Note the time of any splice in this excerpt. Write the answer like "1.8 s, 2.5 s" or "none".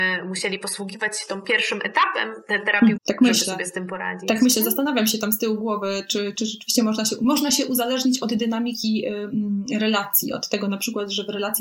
2.9 s